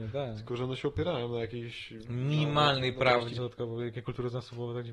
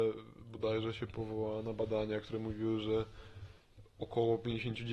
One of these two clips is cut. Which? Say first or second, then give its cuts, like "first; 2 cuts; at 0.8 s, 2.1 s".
first; 1 cut; at 3.4 s